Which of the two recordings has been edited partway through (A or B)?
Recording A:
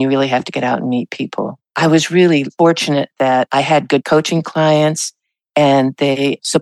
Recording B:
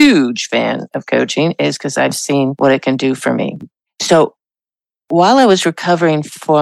A